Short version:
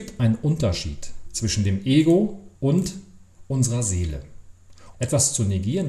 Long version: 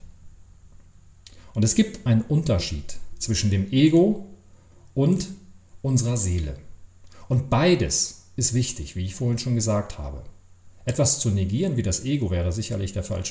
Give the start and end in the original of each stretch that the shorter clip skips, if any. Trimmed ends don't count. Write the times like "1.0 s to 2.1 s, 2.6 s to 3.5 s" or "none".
4.4 s to 4.9 s, 7.3 s to 10.8 s